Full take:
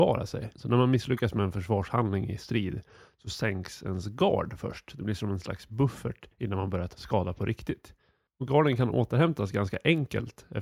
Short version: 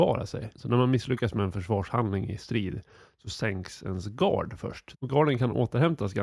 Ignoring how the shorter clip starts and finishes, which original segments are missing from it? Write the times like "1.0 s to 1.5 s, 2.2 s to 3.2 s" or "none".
4.9 s to 8.3 s